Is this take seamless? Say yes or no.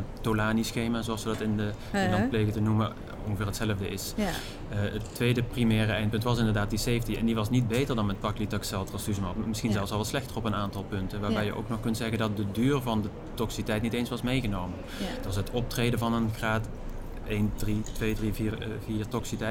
yes